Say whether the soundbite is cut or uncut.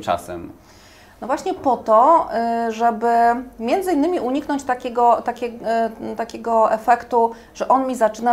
uncut